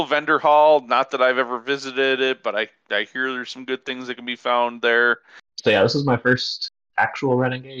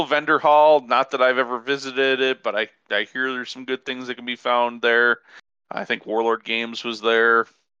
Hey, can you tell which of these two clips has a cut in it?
first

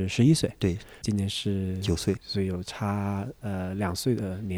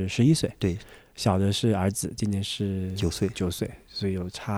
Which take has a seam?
first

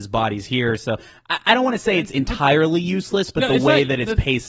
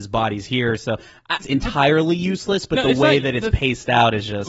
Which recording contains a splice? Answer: second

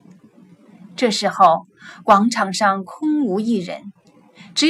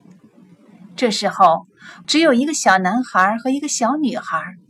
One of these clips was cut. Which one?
second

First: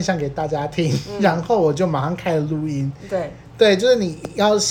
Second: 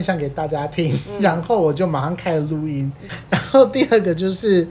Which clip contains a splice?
second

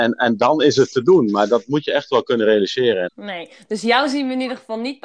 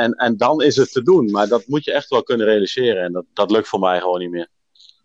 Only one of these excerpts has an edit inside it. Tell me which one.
first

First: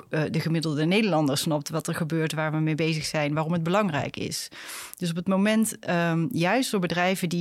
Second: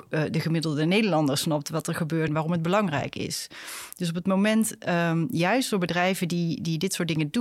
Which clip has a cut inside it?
second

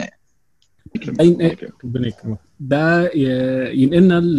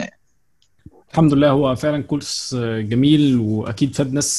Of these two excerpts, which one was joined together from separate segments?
first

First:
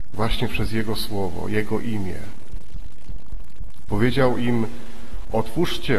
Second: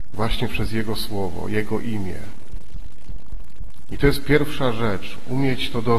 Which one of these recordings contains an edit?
first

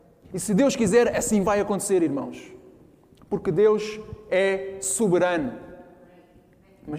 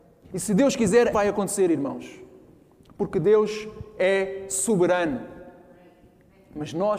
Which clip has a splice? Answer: second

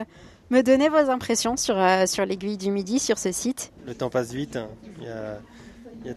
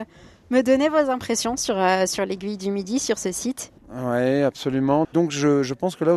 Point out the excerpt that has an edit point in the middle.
second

